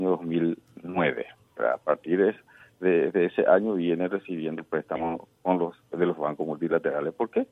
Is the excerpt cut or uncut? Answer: uncut